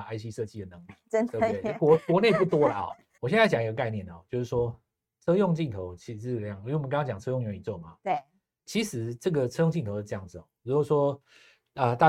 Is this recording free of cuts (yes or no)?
no